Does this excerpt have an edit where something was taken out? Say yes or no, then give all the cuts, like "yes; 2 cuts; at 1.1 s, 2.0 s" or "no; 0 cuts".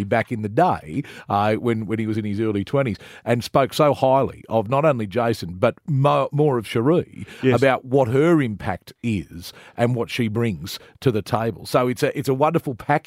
no; 0 cuts